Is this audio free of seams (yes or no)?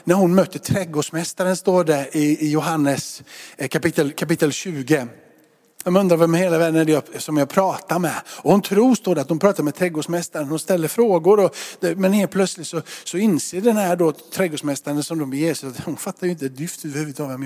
no